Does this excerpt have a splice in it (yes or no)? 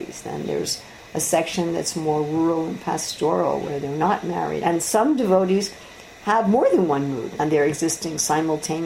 yes